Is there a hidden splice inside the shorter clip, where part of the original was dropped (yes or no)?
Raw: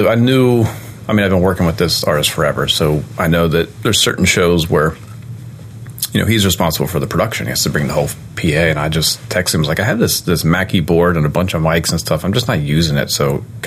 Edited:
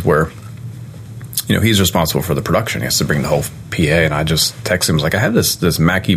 no